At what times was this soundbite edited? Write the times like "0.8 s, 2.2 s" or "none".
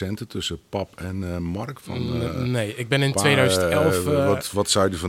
none